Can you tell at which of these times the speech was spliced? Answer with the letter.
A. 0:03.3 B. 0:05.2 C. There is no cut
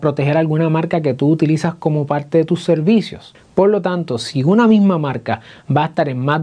A